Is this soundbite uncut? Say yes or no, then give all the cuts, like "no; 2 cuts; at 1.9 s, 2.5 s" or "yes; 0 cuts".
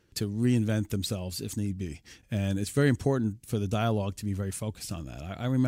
no; 1 cut; at 2.2 s